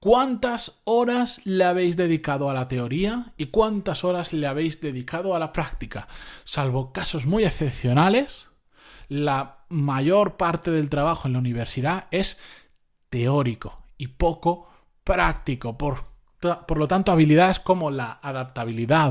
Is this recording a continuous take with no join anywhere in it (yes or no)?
yes